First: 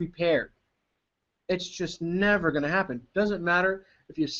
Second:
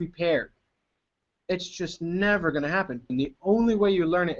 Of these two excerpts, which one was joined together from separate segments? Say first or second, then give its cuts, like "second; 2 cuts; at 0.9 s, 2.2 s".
second; 1 cut; at 3.1 s